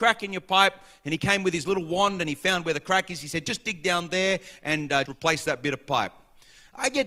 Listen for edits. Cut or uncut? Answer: cut